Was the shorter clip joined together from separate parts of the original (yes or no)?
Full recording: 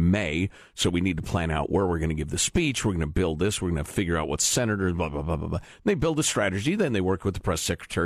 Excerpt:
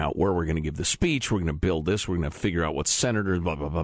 no